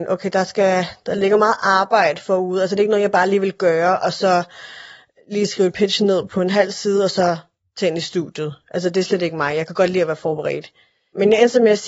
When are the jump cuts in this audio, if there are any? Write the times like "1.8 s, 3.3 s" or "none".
6.3 s